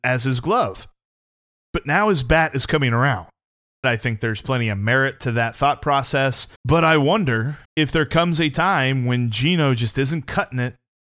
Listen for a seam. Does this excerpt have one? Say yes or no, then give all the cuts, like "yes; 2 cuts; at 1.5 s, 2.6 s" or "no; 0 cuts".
yes; 3 cuts; at 3.8 s, 6.6 s, 7.6 s